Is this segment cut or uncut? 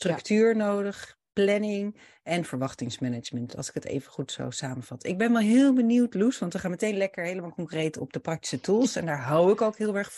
uncut